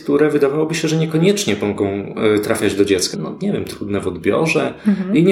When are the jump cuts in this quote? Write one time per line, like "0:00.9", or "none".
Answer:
0:03.1